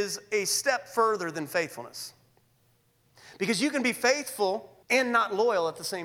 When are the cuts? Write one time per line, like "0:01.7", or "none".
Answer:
0:04.8